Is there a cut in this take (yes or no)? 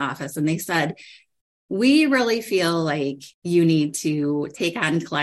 yes